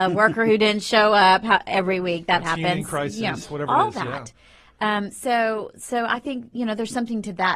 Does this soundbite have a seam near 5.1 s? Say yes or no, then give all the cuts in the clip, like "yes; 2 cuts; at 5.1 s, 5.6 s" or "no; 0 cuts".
no; 0 cuts